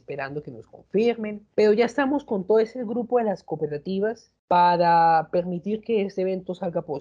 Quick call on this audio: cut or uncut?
cut